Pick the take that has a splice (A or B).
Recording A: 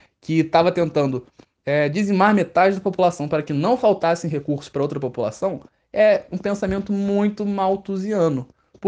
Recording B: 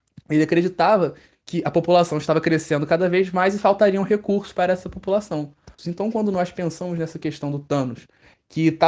B